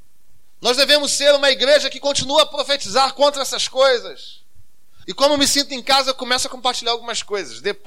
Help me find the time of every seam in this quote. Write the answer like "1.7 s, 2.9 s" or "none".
5.0 s